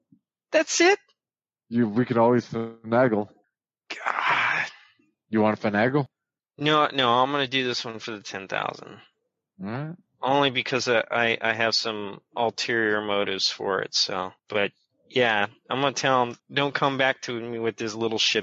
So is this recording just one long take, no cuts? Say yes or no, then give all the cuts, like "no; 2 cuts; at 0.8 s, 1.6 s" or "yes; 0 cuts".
no; 2 cuts; at 14.4 s, 16.4 s